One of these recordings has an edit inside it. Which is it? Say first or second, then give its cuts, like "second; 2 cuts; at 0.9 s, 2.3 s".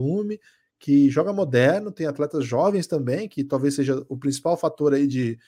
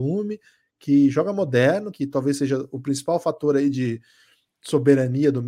second; 1 cut; at 1.9 s